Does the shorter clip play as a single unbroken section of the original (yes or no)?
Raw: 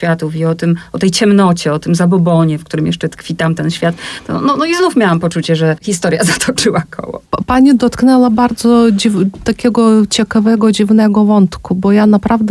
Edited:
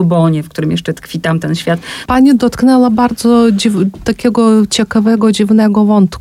no